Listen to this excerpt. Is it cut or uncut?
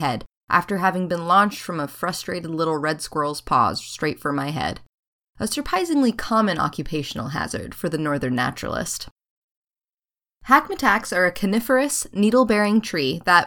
uncut